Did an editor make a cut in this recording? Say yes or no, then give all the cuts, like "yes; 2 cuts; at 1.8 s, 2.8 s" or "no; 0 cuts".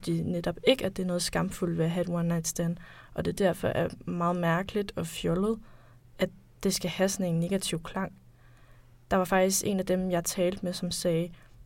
no; 0 cuts